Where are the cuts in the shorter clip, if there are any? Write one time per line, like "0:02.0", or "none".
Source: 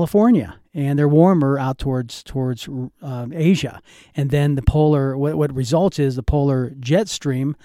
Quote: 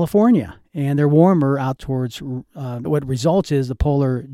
0:01.8
0:02.8